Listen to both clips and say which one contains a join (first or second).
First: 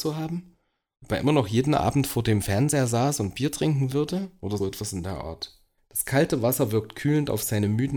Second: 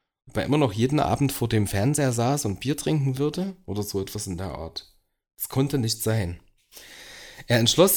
first